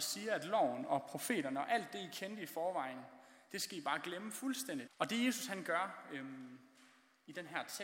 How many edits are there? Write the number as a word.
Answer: one